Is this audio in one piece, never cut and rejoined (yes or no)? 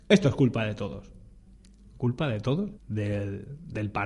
no